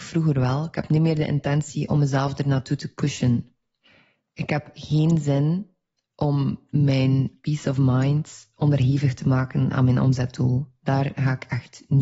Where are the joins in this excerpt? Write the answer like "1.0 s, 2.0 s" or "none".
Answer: none

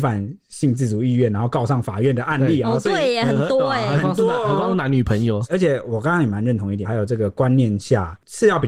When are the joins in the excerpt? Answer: 6.8 s

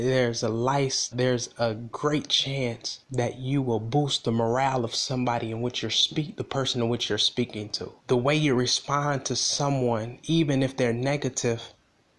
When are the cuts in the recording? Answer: 1.1 s, 3.0 s, 8.0 s

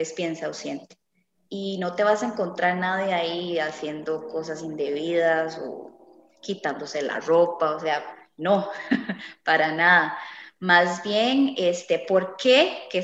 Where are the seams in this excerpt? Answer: none

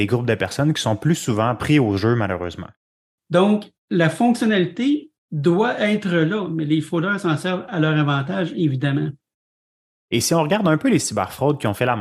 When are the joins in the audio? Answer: 3.2 s

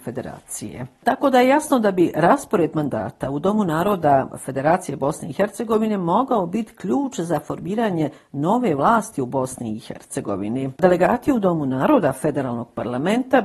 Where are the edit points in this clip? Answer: 10.8 s

